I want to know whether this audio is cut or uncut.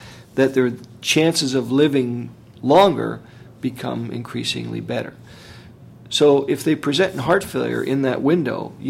uncut